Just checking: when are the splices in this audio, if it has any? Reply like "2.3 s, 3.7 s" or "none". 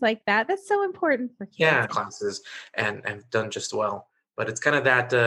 1.9 s